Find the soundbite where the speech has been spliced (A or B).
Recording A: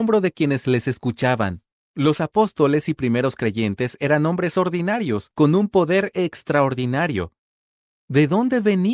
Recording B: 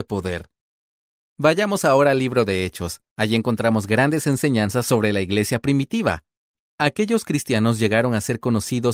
B